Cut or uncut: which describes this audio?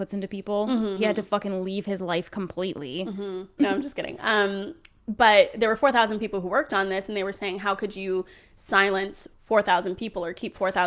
cut